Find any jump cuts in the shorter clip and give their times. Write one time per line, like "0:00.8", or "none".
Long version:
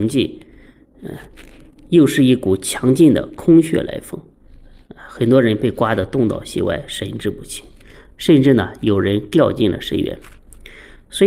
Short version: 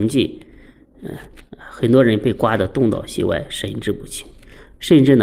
0:01.4